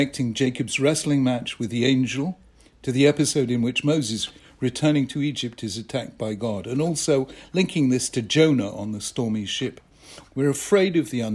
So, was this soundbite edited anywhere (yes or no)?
yes